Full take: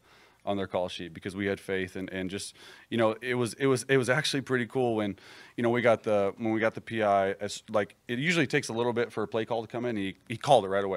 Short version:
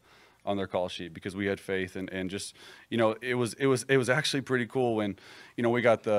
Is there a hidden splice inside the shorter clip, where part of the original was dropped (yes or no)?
no